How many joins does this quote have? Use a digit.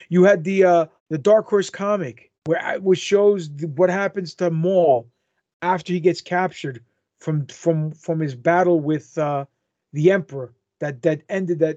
2